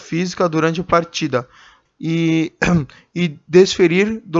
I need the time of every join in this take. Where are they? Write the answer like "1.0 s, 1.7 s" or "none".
1.9 s